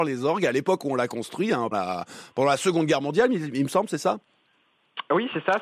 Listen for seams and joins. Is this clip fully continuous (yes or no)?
no